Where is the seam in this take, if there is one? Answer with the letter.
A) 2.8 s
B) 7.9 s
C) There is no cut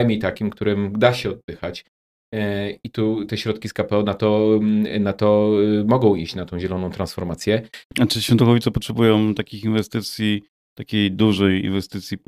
B